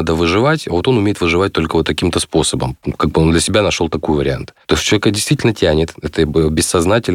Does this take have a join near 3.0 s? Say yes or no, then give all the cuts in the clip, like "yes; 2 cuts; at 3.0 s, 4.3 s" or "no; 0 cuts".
no; 1 cut; at 4.6 s